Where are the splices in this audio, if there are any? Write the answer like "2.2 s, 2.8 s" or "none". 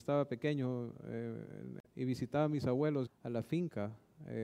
1.8 s, 3.1 s